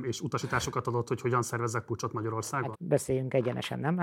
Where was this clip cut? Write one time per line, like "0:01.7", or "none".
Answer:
0:02.7